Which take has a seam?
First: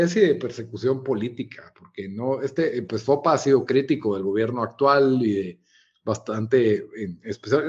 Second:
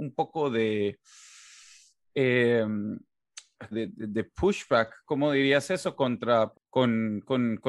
second; 2 cuts; at 3.7 s, 6.5 s

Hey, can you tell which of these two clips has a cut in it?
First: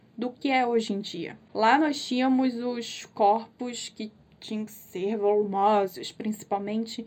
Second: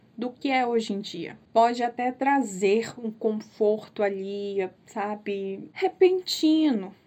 second; 2 cuts; at 1.4 s, 4.7 s

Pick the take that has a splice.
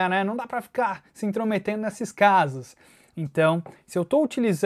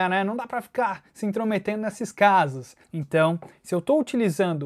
second; 1 cut; at 2.8 s

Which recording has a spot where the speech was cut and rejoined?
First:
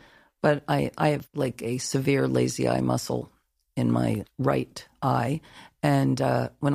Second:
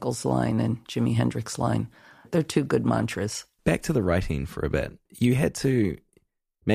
second; 2 cuts; at 3.6 s, 5.1 s

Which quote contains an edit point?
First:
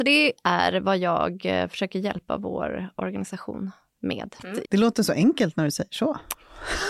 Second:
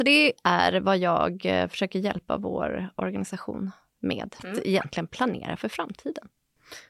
first; 1 cut; at 4.6 s

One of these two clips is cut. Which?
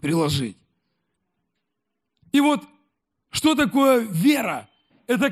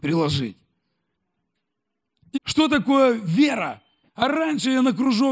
second; 2 cuts; at 2.3 s, 4.1 s

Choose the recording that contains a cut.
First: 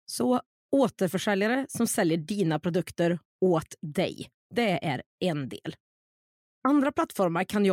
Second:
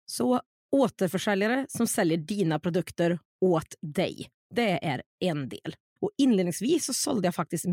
second; 1 cut; at 6.0 s

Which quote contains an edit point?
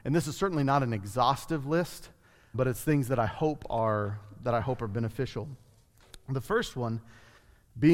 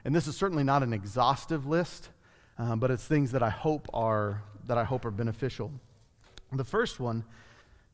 first; 1 cut; at 2.5 s

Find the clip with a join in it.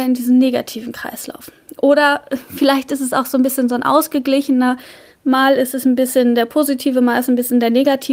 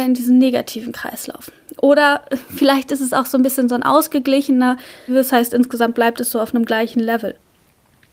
second; 1 cut; at 5.1 s

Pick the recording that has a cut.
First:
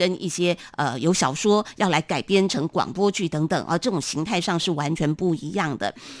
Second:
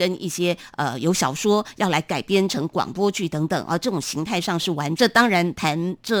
second; 1 cut; at 4.9 s

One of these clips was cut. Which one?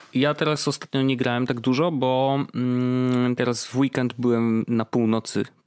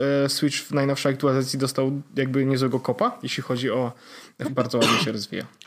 second; 1 cut; at 4.4 s

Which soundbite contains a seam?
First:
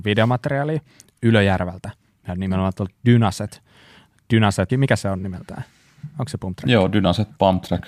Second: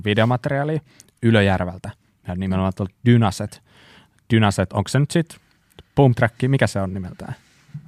first; 1 cut; at 4.7 s

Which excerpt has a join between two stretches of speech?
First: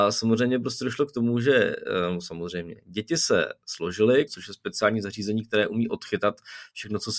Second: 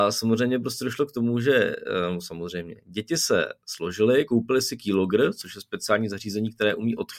first; 1 cut; at 4.3 s

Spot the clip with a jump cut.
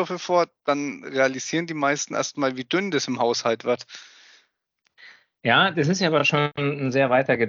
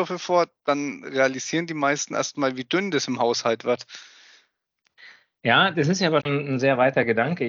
second; 1 cut; at 6.2 s

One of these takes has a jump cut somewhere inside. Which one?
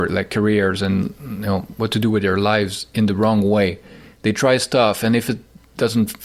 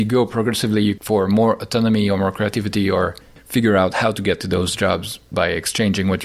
second; 1 cut; at 1.0 s

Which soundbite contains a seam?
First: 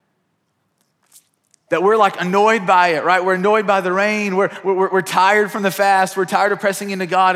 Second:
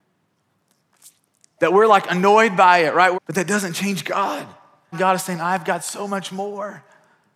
second; 2 cuts; at 3.1 s, 4.9 s

